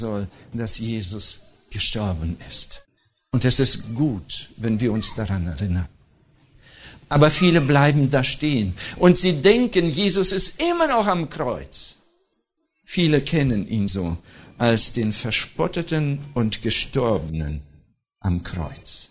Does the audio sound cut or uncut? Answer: uncut